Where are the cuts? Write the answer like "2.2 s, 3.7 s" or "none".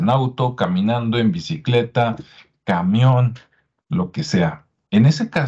none